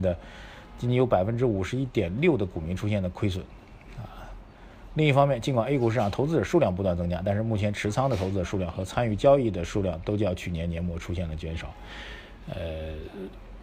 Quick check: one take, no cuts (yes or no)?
yes